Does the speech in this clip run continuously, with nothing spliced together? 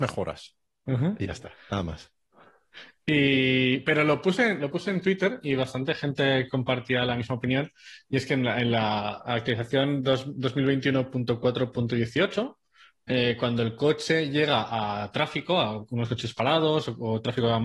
yes; 0 cuts

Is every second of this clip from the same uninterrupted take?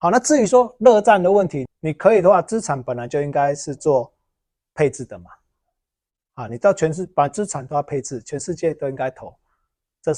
no; 1 cut; at 1.7 s

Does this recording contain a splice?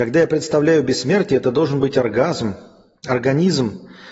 no; 0 cuts

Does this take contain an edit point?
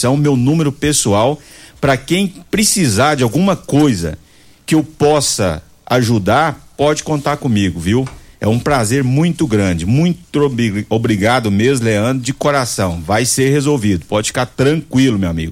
no; 0 cuts

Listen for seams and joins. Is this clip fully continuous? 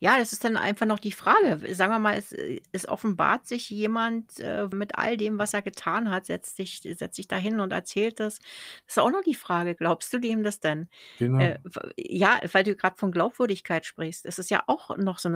no; 1 cut; at 4.7 s

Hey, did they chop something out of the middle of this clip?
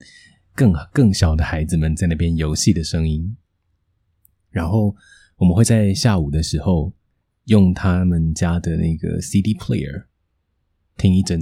no; 0 cuts

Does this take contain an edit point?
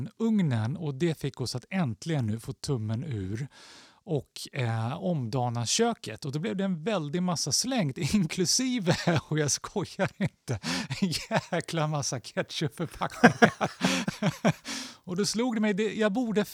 no; 0 cuts

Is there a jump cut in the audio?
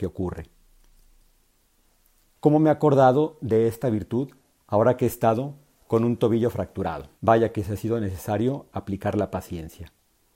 yes; 2 cuts; at 2.3 s, 7.1 s

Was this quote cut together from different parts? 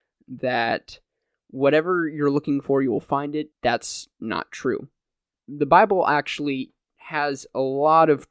yes; 1 cut; at 3.5 s

